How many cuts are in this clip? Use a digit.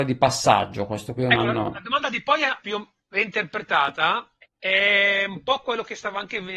1